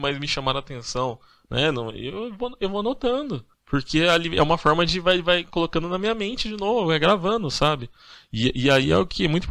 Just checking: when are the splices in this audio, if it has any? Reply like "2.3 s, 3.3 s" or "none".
3.5 s